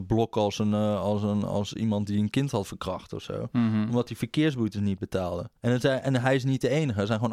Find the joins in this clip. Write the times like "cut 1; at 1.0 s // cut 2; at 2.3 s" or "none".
cut 1; at 5.6 s